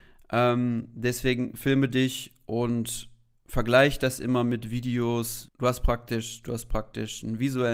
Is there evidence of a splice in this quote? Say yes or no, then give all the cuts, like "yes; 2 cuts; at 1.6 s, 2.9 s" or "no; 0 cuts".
yes; 1 cut; at 5.5 s